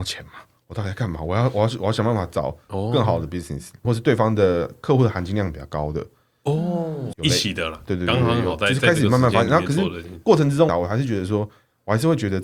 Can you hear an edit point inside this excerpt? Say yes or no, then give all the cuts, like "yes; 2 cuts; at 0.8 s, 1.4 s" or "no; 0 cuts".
yes; 3 cuts; at 3.8 s, 7.1 s, 10.7 s